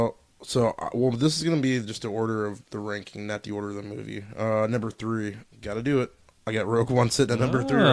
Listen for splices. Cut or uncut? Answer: cut